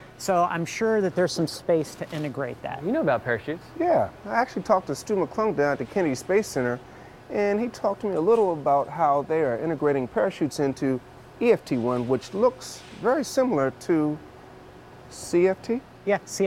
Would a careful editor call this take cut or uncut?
uncut